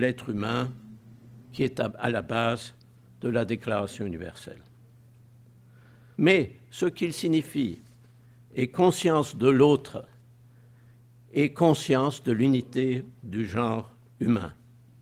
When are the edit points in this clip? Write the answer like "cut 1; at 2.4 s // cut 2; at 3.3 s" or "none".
cut 1; at 6.1 s